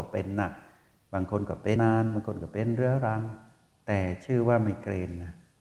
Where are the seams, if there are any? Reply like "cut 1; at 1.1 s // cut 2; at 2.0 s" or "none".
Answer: cut 1; at 1.8 s